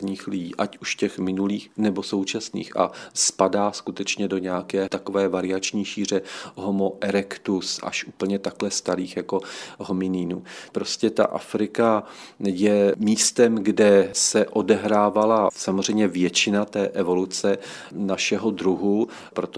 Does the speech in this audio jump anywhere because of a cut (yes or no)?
no